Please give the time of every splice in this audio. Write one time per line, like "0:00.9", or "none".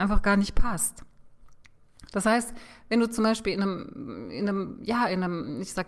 none